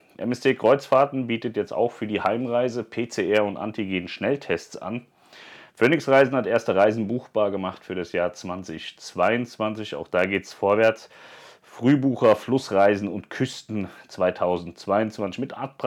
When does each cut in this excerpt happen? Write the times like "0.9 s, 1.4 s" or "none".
5.7 s